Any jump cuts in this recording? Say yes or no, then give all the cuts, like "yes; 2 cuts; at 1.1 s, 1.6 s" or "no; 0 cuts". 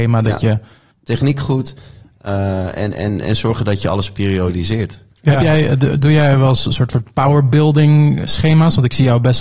yes; 1 cut; at 0.9 s